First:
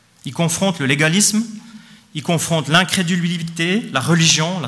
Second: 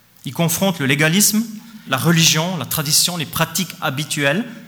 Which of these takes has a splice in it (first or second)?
second